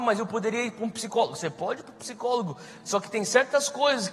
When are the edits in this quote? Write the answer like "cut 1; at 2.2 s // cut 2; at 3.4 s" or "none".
none